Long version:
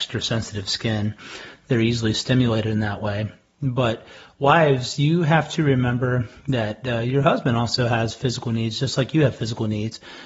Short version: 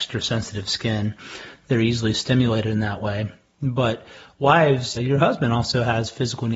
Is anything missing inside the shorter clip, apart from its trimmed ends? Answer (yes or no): yes